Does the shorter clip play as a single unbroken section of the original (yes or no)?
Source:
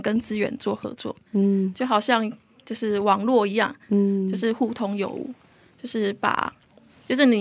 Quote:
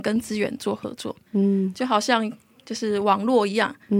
yes